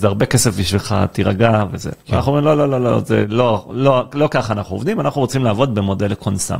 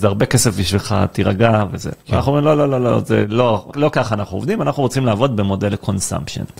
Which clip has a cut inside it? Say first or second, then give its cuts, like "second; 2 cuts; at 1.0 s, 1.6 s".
second; 1 cut; at 3.7 s